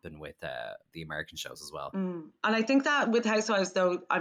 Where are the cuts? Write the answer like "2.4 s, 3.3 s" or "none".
none